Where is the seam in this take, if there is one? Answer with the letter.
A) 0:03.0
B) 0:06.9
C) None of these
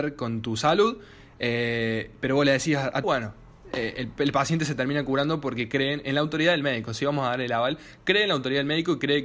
A